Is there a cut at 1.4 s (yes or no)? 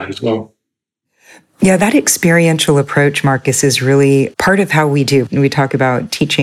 no